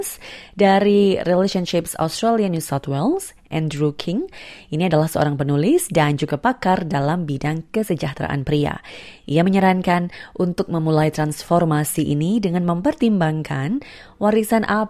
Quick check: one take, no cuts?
yes; 0 cuts

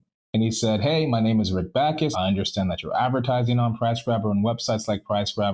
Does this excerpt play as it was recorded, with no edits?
no; 1 cut; at 2.1 s

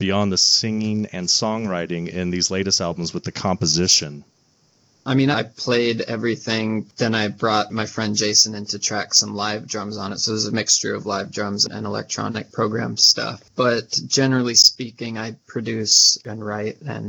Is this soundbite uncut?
no; 1 cut; at 5.3 s

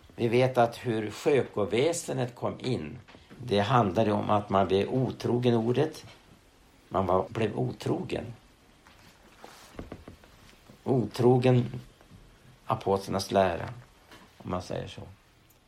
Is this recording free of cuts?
no; 3 cuts; at 3.3 s, 7.3 s, 14.3 s

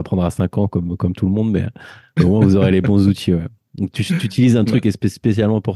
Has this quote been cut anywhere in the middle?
no; 0 cuts

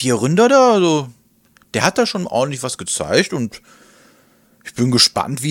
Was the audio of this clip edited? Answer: no; 0 cuts

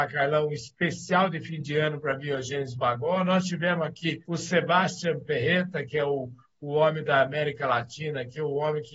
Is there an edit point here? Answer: no; 0 cuts

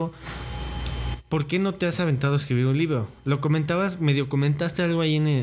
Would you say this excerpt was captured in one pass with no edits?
yes; 0 cuts

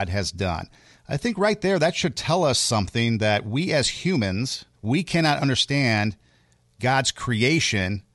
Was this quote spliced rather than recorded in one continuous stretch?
yes; 1 cut; at 4.7 s

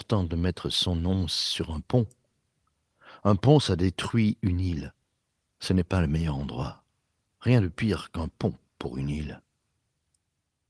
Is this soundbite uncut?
yes; 0 cuts

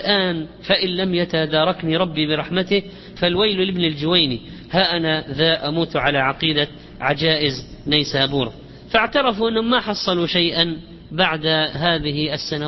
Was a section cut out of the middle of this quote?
yes; 1 cut; at 3.2 s

